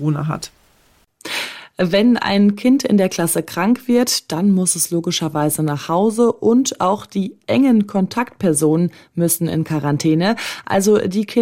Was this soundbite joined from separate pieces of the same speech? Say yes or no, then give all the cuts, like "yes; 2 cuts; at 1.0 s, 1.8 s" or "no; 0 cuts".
no; 0 cuts